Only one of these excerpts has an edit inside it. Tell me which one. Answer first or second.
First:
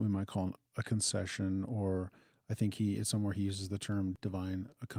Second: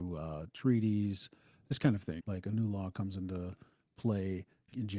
second